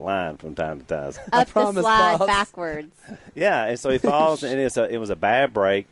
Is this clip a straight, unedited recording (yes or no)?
no